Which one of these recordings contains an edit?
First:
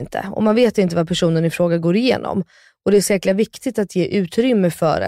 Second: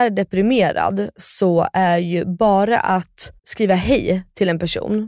second; 2 cuts; at 1.1 s, 3.4 s

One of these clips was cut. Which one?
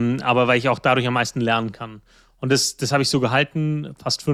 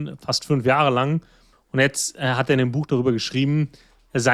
second; 1 cut; at 1.5 s

